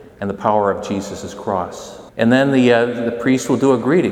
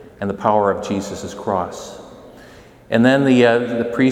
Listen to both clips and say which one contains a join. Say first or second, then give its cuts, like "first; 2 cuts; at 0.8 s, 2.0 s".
first; 1 cut; at 2.1 s